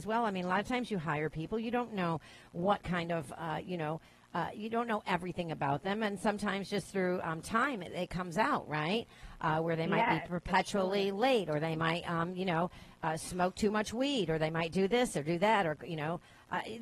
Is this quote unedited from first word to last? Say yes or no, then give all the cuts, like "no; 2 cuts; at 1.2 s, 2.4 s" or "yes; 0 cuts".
yes; 0 cuts